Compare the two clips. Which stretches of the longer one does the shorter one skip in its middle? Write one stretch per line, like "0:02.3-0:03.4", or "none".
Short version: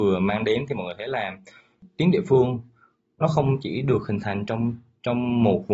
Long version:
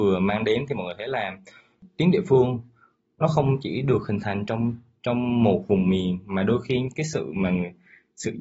none

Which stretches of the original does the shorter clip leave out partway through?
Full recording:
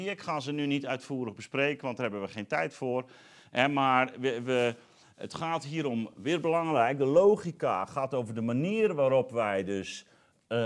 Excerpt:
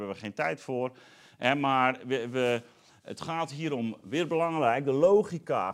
none

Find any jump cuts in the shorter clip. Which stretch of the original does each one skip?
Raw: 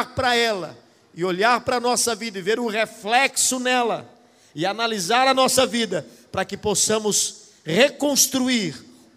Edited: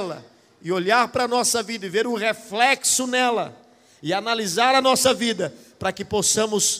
none

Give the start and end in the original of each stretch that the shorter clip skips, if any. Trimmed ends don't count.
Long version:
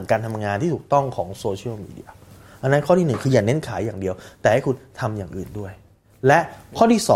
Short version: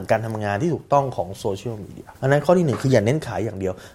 0:02.1-0:02.6

